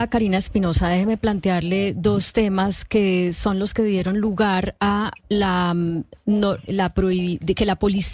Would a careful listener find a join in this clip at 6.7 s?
yes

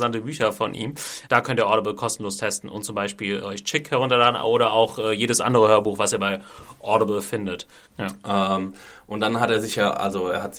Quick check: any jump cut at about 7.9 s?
yes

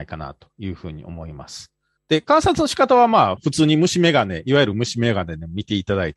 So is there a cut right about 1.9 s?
no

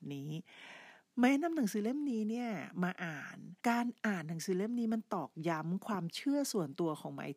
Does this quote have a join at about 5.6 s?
no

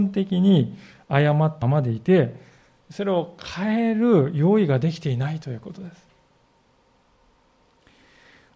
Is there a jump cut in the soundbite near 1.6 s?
yes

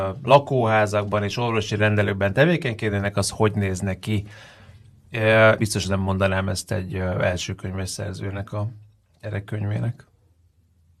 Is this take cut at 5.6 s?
yes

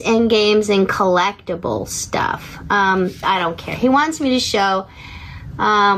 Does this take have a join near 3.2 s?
yes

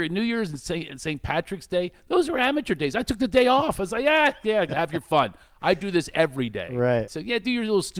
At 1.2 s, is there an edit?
no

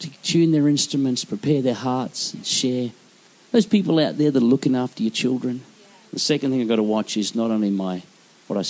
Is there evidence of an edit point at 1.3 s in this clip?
no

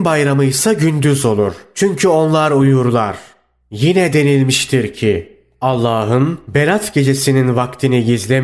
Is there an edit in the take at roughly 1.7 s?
no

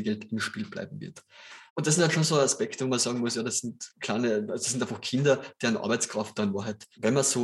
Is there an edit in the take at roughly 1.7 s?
yes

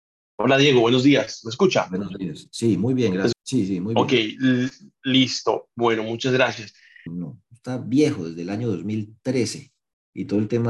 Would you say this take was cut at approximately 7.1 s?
yes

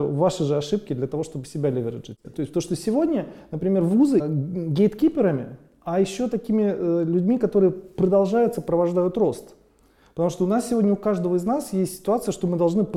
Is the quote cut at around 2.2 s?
yes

